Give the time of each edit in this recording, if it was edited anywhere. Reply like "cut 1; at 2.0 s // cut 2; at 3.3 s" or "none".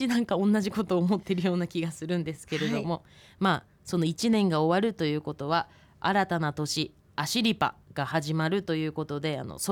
none